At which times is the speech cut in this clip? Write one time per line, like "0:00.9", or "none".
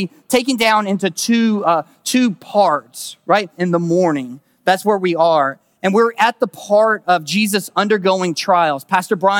0:03.6